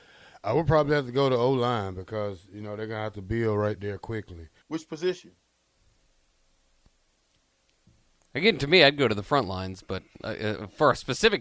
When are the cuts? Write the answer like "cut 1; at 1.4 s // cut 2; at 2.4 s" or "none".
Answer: cut 1; at 4.6 s